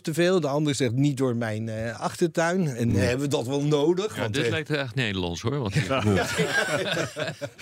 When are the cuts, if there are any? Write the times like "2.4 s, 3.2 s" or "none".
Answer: none